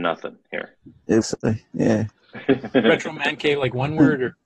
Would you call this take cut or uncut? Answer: cut